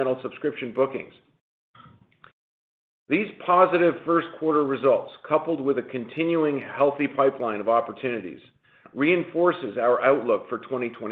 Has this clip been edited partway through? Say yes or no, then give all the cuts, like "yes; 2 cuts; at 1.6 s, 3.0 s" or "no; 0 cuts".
no; 0 cuts